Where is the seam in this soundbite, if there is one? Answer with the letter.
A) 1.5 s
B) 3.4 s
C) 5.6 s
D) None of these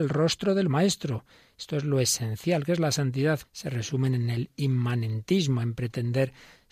B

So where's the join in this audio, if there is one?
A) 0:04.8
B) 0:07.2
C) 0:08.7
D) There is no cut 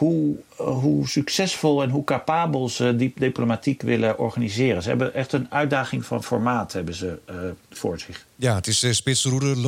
D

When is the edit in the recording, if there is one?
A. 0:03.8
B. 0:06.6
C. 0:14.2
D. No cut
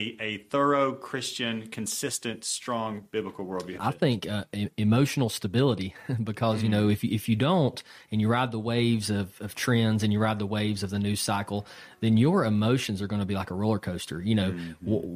A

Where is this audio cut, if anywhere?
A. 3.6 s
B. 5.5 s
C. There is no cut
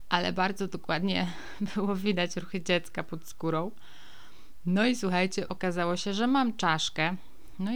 B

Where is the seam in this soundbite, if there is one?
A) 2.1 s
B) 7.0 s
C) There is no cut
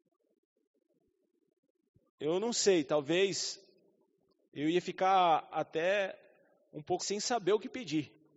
B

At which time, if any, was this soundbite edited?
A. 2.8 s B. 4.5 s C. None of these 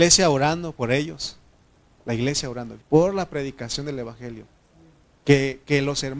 A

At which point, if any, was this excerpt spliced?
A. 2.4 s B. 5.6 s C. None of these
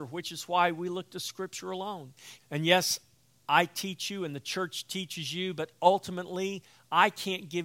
A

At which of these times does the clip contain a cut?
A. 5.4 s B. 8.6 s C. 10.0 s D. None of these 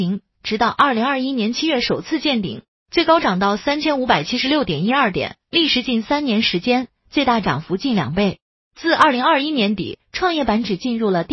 D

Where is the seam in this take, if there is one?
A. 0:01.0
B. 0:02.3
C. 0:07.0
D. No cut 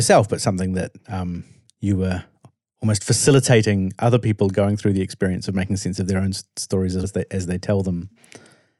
C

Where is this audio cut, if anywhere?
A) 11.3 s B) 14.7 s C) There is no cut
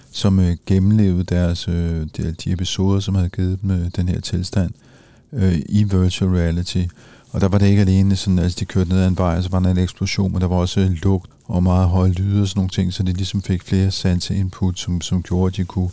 A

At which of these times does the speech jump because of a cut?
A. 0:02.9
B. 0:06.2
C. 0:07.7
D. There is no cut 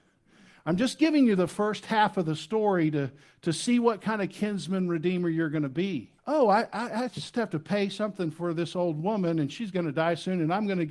B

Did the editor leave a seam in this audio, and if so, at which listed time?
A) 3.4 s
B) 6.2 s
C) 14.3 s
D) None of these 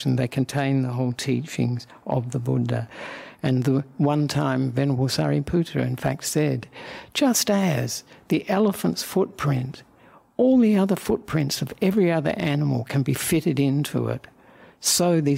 D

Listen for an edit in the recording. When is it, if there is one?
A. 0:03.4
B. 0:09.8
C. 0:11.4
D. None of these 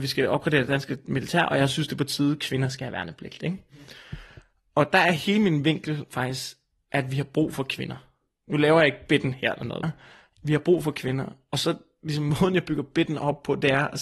B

